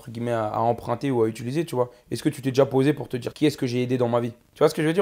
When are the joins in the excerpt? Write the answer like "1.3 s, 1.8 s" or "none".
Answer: 3.3 s